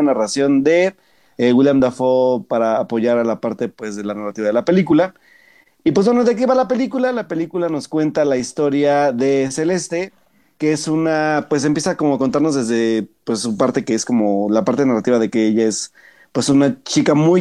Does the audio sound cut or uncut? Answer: uncut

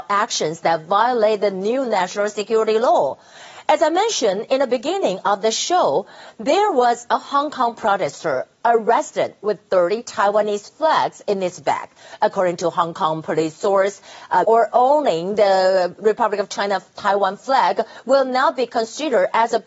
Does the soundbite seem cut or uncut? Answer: cut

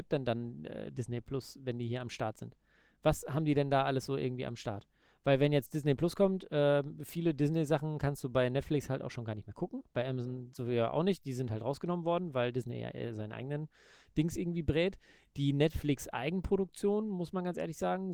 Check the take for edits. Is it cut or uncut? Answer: uncut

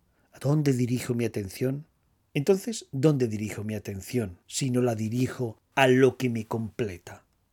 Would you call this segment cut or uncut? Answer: cut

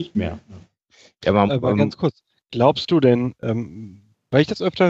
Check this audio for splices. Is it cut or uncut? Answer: cut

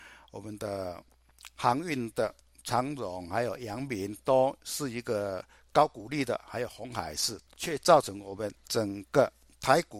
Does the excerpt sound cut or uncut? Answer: cut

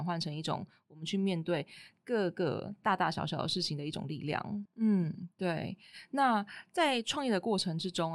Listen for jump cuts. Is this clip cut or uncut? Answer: cut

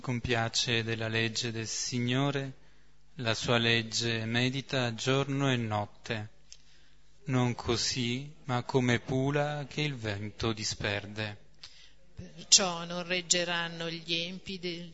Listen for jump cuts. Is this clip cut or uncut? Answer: cut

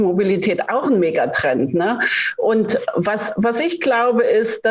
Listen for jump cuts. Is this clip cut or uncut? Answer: uncut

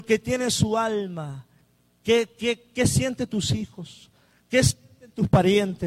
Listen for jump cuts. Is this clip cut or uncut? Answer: uncut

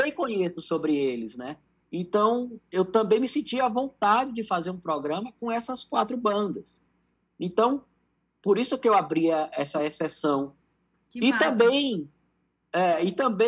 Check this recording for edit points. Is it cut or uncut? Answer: cut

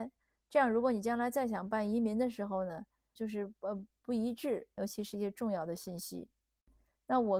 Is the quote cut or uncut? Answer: cut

